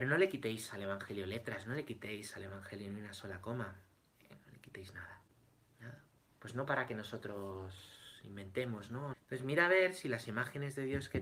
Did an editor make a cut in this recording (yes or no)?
yes